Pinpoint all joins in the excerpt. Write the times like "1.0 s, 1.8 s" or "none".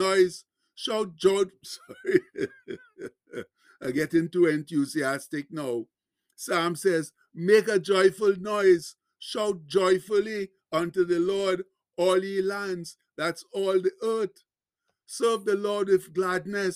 none